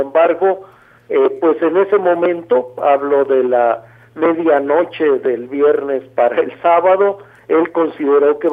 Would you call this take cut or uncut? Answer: uncut